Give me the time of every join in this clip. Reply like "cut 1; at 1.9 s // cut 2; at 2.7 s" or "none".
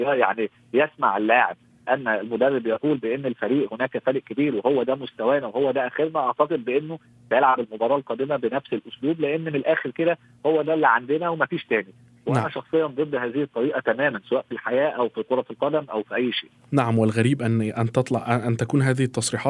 none